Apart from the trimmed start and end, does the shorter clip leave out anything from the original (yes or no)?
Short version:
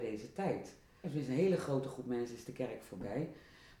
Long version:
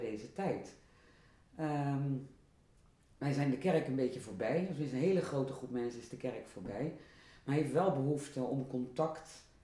yes